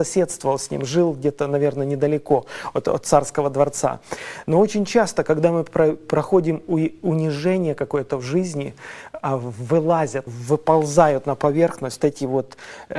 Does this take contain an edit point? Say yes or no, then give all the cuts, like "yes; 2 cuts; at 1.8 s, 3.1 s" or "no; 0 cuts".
yes; 2 cuts; at 10.3 s, 12.0 s